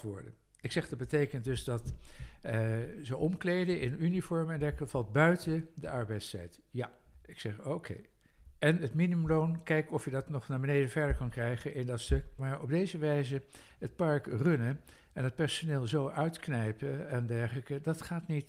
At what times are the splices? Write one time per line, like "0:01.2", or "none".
0:12.4